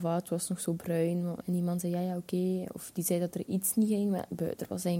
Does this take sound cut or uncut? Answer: cut